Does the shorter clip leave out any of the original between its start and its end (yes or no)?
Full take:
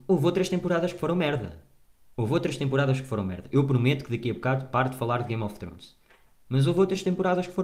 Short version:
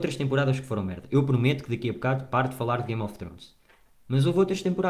no